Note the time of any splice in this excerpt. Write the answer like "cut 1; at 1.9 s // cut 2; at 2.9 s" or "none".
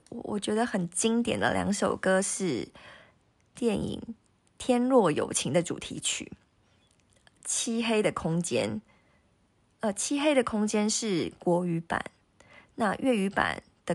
none